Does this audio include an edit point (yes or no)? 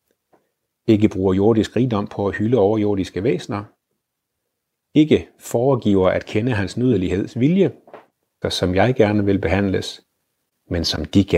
yes